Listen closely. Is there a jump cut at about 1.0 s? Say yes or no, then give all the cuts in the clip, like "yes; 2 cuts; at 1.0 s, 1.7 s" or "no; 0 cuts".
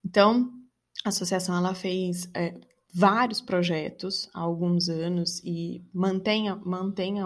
no; 0 cuts